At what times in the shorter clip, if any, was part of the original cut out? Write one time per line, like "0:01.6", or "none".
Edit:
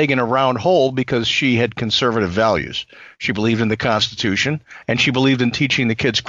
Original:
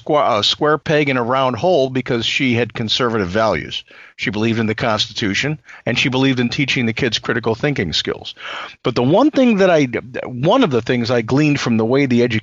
none